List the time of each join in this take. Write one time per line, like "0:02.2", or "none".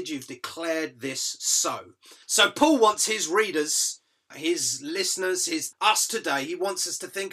0:02.2
0:04.3
0:05.7